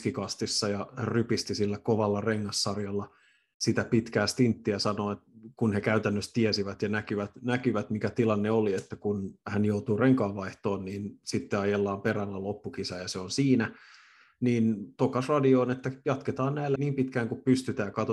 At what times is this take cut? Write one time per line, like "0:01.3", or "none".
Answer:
0:16.8